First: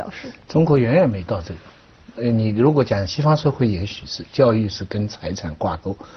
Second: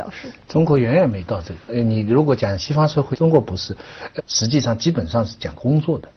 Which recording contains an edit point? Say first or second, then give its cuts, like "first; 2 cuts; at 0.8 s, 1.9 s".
second; 3 cuts; at 1.6 s, 3.1 s, 4.2 s